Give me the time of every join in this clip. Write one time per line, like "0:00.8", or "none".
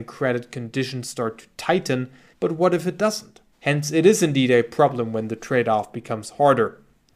0:02.3
0:03.5